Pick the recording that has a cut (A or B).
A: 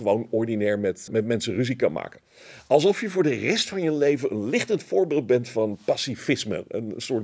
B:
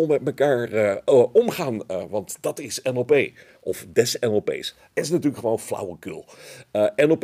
A